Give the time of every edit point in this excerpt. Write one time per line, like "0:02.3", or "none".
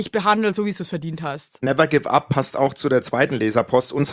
0:01.6